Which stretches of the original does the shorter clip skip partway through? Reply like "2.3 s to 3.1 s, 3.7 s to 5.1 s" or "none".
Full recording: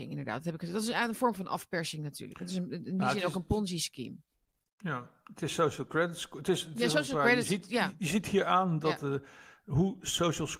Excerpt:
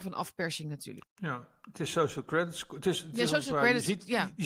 2.3 s to 4.6 s